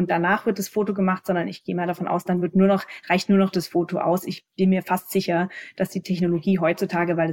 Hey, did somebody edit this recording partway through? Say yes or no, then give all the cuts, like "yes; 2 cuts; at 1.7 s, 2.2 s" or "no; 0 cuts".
no; 0 cuts